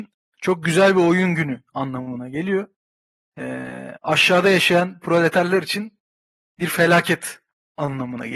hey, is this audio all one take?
yes; 0 cuts

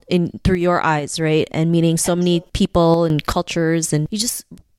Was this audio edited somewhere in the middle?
no; 0 cuts

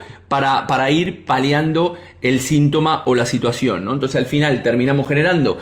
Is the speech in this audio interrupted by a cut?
no; 0 cuts

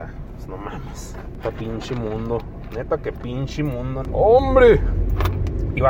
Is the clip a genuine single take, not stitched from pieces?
yes; 0 cuts

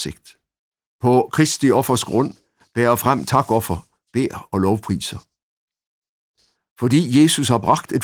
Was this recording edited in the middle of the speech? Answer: no; 0 cuts

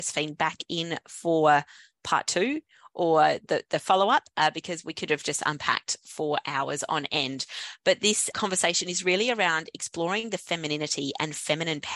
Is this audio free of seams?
no; 1 cut; at 8.3 s

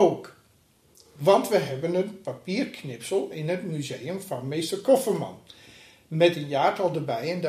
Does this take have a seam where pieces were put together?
no; 0 cuts

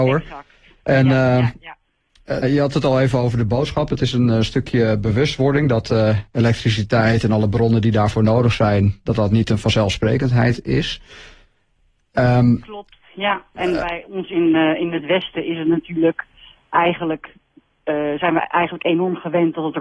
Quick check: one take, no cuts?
no; 1 cut; at 2.4 s

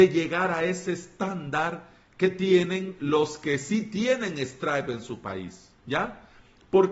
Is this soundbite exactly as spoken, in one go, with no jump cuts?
no; 1 cut; at 5.8 s

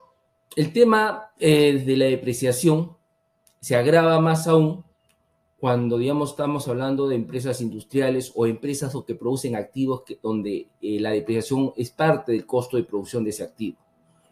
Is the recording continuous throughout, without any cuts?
yes; 0 cuts

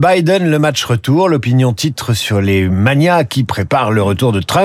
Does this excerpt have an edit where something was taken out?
no; 0 cuts

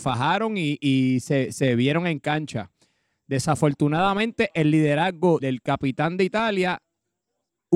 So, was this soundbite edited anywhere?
yes; 1 cut; at 5.4 s

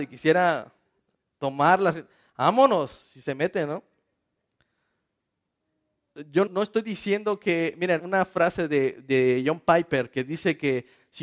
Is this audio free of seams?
no; 2 cuts; at 6.5 s, 8.0 s

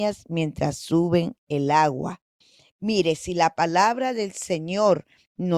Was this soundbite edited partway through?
no; 0 cuts

